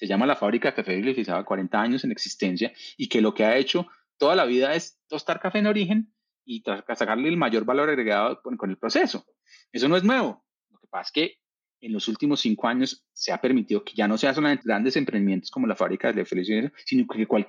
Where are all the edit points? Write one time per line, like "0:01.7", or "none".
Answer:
0:01.4
0:14.6